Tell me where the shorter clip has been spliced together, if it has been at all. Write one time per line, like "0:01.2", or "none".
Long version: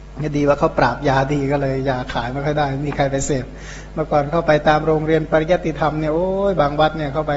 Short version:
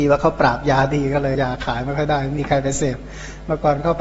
0:01.4